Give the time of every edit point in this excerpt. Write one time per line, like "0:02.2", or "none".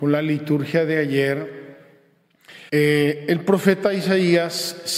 0:02.7